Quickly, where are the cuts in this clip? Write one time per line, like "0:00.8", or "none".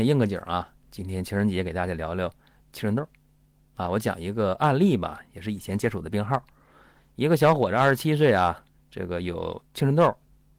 0:09.7